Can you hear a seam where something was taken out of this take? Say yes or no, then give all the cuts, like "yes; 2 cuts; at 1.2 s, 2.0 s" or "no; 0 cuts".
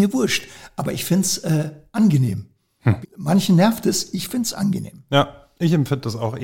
yes; 1 cut; at 3.0 s